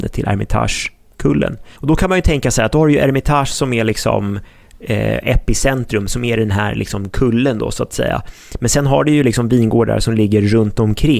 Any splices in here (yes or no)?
yes